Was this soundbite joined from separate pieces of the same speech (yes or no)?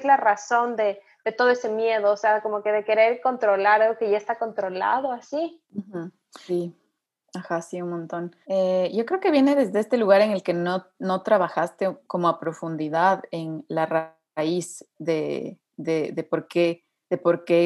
yes